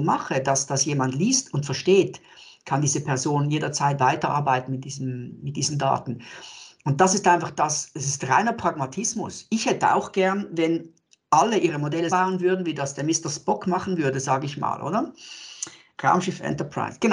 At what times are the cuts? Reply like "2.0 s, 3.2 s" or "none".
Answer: 12.1 s